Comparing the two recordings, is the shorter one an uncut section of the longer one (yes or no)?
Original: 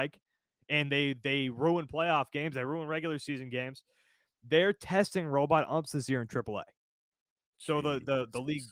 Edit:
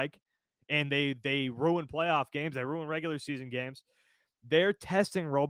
yes